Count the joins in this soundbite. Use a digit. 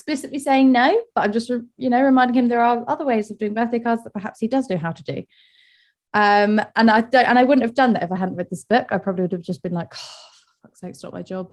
0